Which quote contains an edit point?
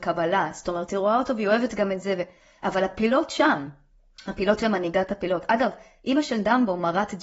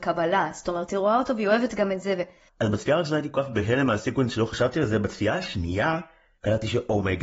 second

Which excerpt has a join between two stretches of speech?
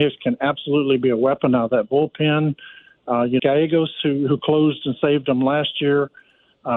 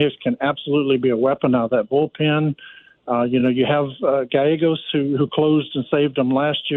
first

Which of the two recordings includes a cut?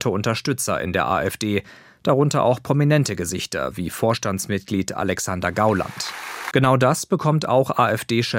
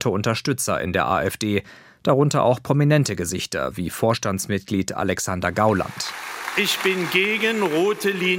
first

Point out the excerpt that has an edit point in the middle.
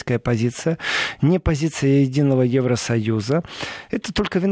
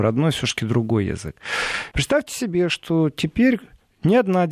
second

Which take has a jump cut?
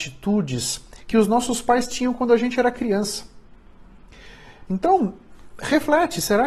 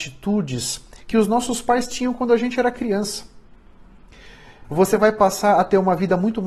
second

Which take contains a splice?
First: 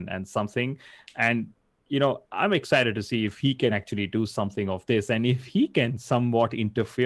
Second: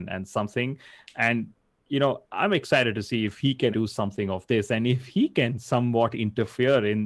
second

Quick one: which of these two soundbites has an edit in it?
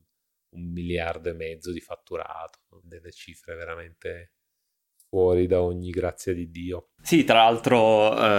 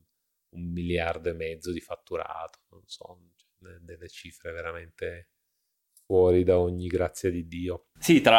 first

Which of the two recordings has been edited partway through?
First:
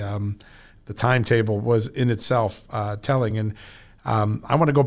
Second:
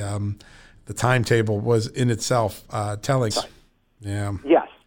second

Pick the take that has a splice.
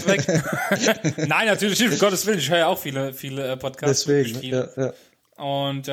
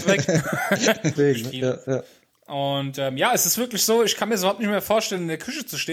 second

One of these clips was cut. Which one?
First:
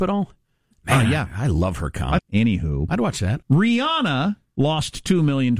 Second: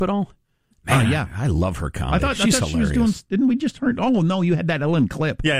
first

